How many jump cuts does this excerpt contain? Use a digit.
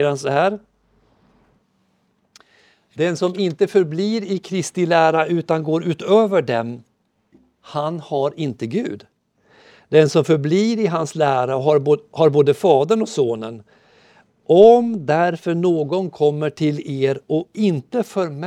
0